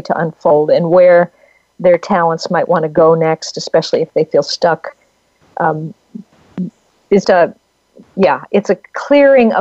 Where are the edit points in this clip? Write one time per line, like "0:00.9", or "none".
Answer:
0:07.2

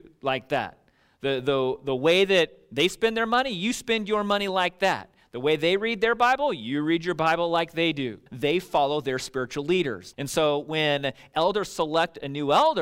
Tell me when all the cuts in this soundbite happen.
0:08.3
0:10.1

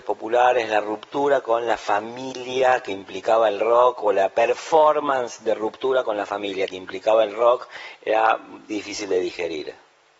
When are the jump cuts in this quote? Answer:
0:08.7

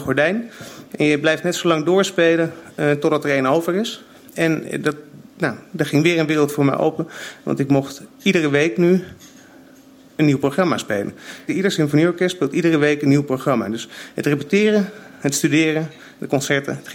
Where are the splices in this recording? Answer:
0:04.3
0:11.5

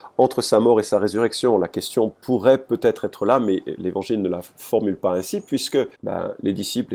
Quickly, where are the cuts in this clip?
0:05.9

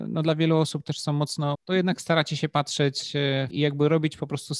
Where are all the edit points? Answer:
0:01.5
0:03.5

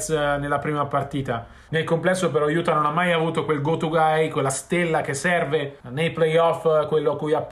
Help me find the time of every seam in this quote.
0:01.7
0:05.8

